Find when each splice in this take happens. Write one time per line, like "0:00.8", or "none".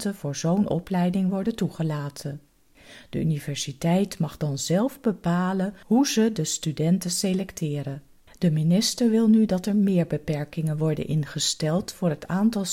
0:08.3